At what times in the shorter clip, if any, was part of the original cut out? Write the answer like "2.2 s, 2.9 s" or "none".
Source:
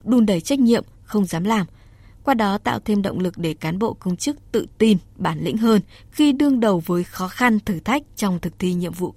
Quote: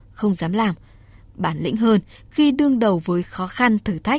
1.3 s